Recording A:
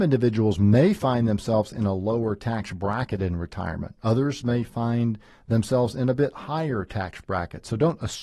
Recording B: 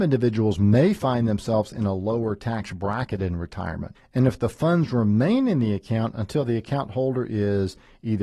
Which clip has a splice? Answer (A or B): B